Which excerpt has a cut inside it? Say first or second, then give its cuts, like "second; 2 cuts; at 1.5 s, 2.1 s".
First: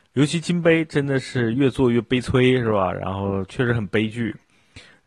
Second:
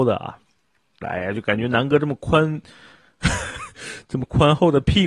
second; 1 cut; at 1.0 s